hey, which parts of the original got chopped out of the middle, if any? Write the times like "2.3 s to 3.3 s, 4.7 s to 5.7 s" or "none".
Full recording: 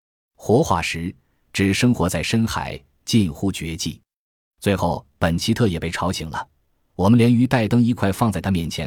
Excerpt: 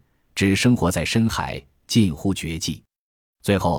none